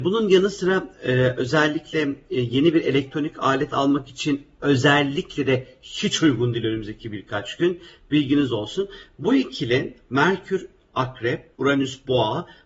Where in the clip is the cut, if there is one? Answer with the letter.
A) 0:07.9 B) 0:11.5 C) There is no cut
B